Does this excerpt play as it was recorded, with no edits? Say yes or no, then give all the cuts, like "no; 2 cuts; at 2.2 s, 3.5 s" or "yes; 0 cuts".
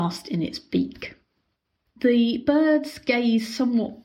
yes; 0 cuts